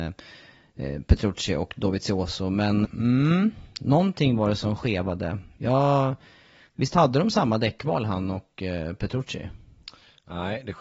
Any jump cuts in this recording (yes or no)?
yes